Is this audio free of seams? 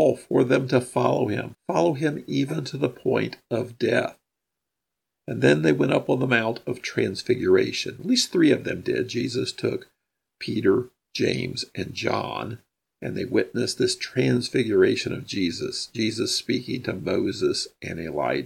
yes; 0 cuts

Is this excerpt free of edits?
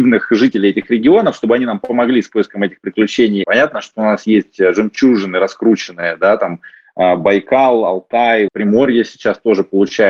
no; 2 cuts; at 3.4 s, 8.5 s

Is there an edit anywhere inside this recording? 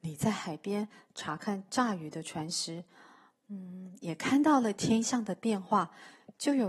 no; 0 cuts

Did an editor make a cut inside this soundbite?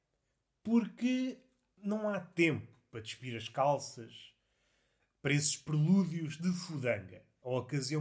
no; 0 cuts

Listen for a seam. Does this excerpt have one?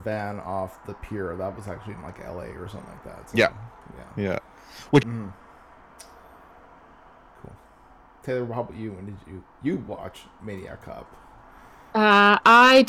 yes; 1 cut; at 5.0 s

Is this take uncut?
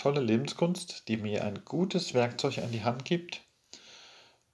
yes; 0 cuts

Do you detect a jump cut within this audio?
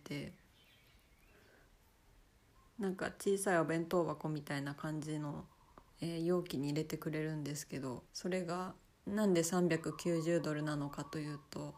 yes; 2 cuts; at 5.9 s, 8.1 s

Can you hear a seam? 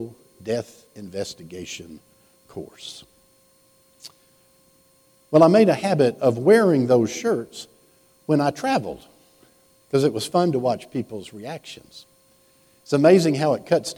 no; 0 cuts

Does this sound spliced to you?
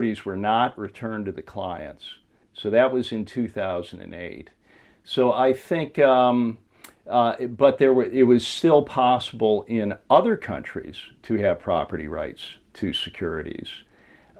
no; 0 cuts

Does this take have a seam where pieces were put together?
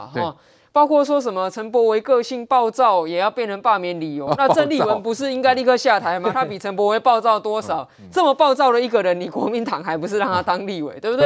no; 0 cuts

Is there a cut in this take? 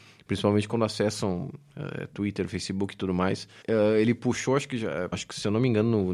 yes; 2 cuts; at 3.6 s, 5.1 s

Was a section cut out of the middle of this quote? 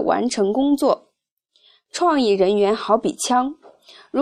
no; 0 cuts

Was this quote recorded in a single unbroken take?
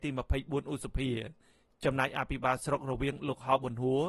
yes; 0 cuts

